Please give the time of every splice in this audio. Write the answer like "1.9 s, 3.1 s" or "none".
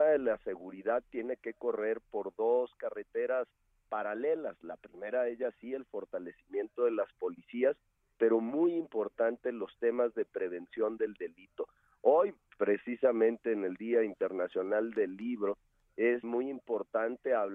16.2 s